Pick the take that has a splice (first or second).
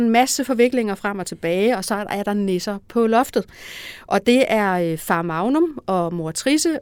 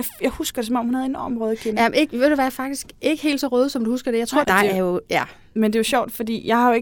second